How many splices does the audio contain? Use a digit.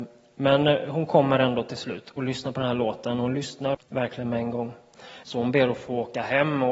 2